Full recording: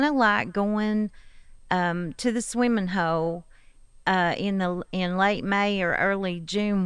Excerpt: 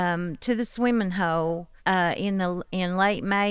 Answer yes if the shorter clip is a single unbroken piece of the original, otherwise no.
no